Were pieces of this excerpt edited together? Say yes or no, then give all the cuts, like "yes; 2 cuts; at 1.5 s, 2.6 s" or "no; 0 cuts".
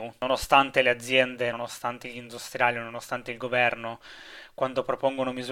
no; 0 cuts